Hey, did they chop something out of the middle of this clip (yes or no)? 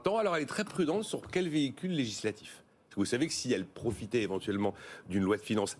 no